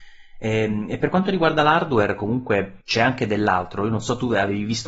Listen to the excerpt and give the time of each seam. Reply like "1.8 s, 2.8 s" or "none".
2.8 s